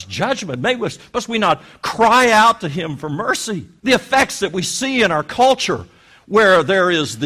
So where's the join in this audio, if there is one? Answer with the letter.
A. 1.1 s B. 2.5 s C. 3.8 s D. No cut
C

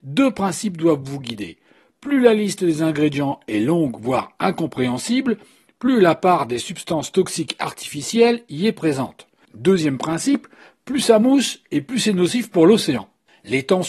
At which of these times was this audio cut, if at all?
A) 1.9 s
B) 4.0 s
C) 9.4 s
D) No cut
C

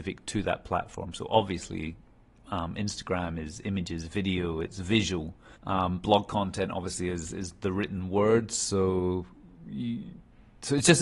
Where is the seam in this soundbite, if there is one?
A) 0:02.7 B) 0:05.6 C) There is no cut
B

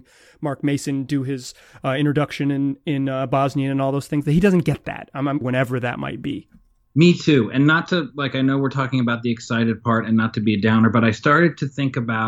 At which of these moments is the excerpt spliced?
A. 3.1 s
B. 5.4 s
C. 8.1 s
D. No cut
B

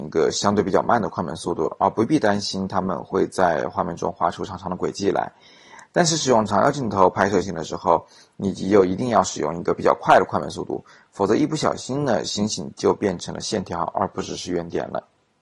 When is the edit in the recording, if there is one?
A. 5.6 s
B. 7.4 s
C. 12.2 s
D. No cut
B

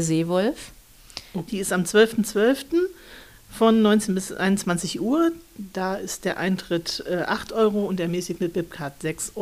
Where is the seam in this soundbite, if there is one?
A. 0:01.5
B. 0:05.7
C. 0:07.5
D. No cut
A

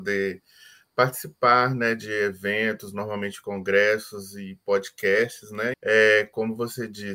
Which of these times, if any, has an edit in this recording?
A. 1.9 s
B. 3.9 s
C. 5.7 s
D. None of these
C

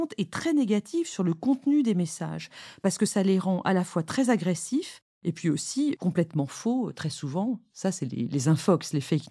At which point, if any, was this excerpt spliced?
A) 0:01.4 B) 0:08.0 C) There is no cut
C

